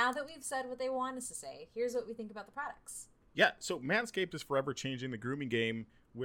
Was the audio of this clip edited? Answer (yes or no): no